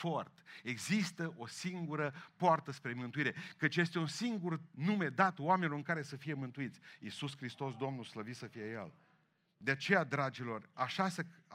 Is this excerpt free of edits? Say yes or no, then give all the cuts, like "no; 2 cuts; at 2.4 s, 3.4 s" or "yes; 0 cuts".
yes; 0 cuts